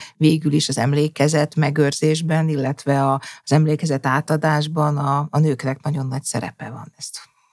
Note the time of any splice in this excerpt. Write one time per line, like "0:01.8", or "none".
none